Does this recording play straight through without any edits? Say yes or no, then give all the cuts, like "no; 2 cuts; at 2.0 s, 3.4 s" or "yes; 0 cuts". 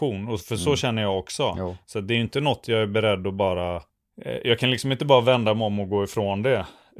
yes; 0 cuts